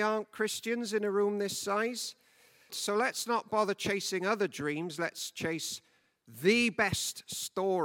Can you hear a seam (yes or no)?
yes